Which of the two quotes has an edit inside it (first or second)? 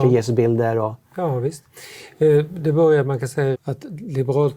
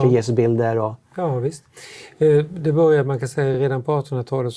first